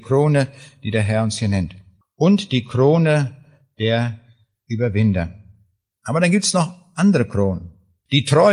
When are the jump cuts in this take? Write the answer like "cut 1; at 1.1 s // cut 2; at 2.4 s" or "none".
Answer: cut 1; at 5.9 s